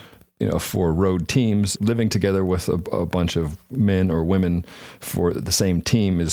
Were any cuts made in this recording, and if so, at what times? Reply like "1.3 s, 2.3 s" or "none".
1.7 s, 5.3 s